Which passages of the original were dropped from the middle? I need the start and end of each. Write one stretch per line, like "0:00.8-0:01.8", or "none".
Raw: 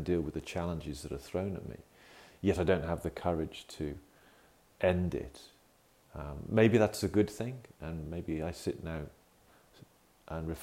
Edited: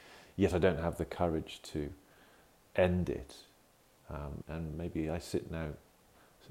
0:06.5-0:07.7